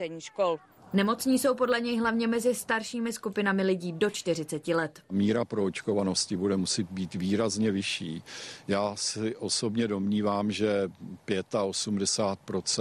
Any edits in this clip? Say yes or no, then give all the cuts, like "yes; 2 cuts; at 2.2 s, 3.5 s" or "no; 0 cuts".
no; 0 cuts